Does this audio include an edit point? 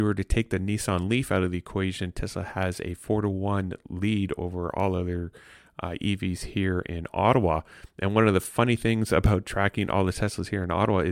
no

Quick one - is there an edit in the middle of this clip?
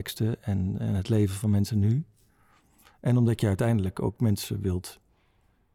no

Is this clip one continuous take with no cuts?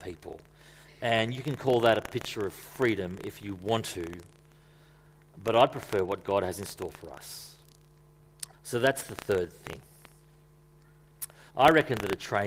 no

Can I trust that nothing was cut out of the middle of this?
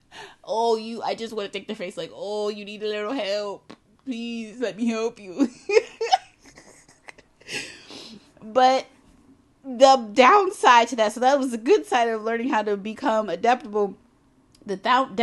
yes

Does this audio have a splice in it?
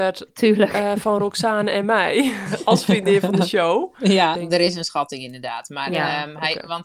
yes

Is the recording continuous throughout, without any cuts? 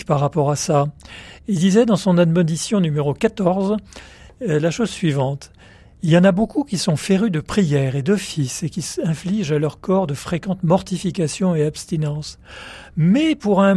yes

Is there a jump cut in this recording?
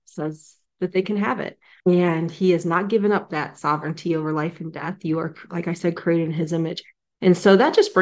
yes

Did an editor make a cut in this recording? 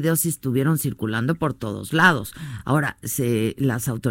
no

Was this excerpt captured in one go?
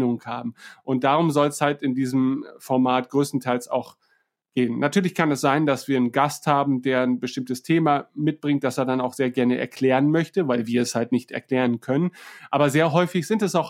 yes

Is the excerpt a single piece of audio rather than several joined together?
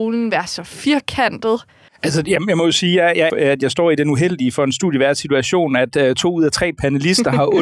no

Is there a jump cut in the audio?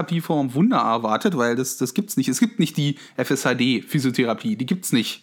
no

